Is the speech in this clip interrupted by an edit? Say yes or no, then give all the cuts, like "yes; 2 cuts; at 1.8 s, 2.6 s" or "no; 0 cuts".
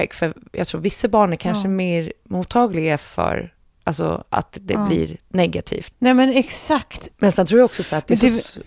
yes; 2 cuts; at 5.9 s, 7.1 s